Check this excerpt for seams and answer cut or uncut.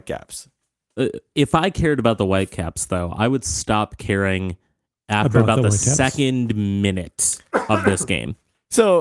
uncut